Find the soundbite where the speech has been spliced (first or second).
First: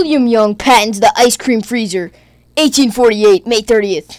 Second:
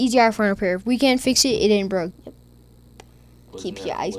second